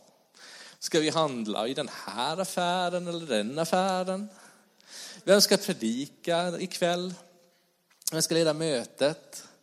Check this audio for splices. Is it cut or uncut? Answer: uncut